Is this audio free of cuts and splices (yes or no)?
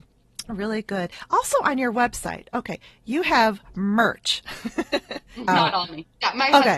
no